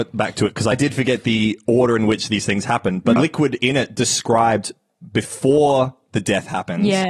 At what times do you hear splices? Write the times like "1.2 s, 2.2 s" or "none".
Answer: 3.2 s

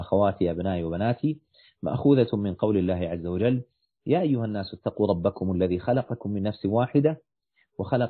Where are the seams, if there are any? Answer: none

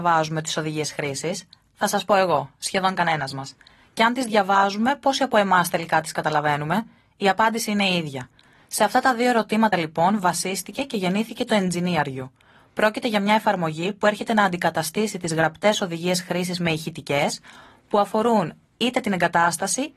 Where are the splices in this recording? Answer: none

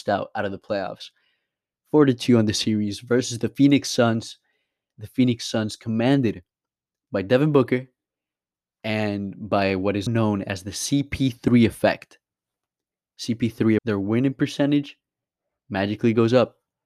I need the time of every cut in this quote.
10.1 s, 13.8 s

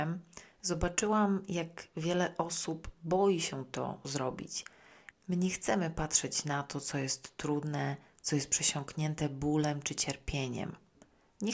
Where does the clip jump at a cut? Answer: 5.1 s

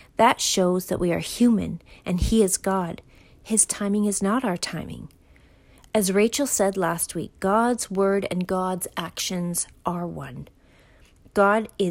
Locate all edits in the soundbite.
none

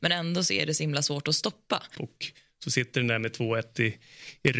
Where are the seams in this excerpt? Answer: 1.9 s

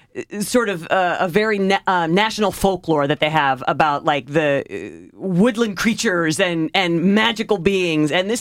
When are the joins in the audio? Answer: none

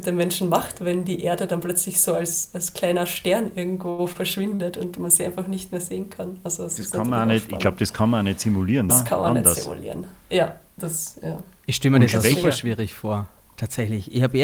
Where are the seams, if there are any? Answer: 8.9 s

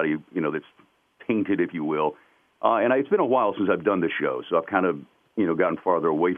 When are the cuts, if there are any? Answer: none

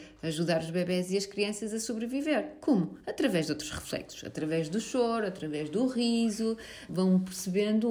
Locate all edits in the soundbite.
6.9 s

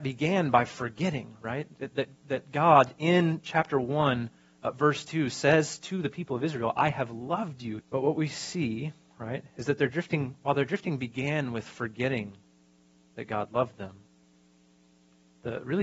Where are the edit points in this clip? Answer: 7.8 s

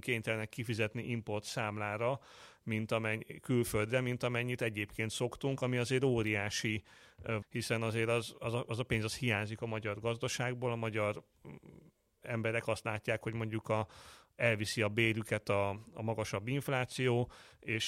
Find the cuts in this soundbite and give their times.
7.4 s

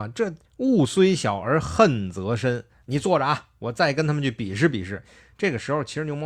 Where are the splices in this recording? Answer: none

